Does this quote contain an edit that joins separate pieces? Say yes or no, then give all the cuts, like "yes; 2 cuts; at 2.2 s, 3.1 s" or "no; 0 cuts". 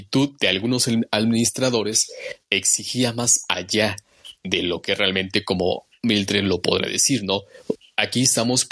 no; 0 cuts